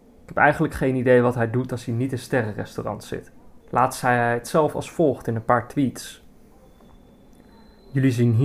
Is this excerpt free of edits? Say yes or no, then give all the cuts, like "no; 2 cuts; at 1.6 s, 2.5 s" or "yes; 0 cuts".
no; 1 cut; at 3.6 s